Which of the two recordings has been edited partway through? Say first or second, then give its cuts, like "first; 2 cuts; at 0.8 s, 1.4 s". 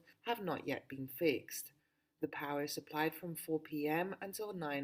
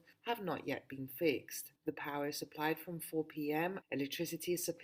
second; 2 cuts; at 1.8 s, 3.8 s